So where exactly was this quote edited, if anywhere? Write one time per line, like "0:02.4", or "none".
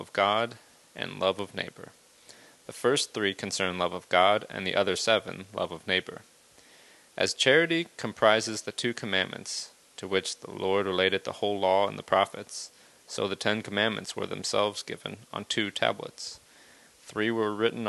none